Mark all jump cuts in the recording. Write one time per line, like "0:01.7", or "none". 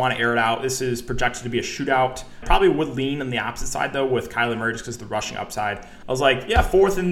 0:02.4
0:06.0

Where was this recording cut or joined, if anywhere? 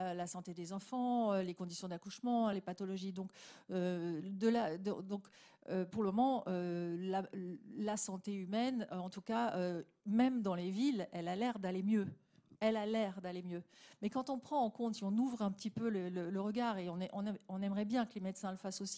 0:02.5

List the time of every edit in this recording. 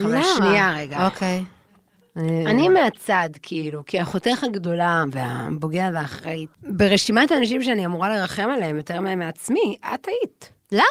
0:06.5

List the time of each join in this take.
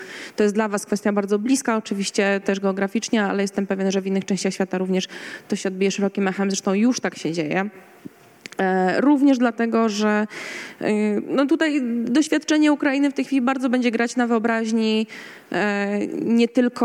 none

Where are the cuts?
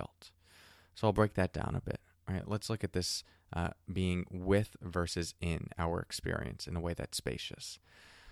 none

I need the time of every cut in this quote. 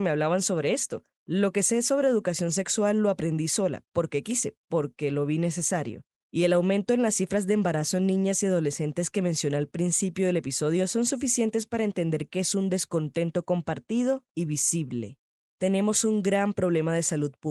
none

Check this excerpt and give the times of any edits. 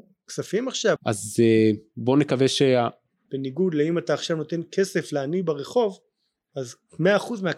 0:01.0
0:03.3

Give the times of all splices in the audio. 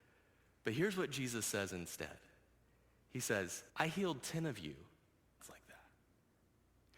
0:03.7
0:05.4

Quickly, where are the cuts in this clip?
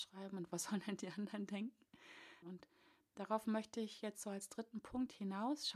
0:02.4

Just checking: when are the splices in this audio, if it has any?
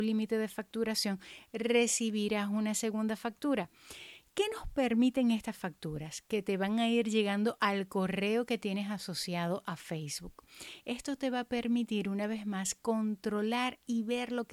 none

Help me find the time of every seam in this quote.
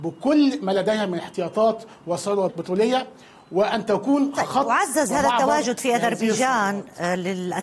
0:02.5

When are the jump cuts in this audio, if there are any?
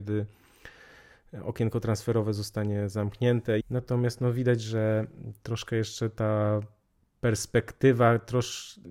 0:03.6

